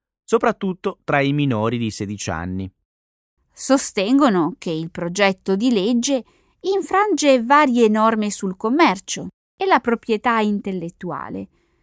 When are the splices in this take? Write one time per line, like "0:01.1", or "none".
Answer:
0:03.4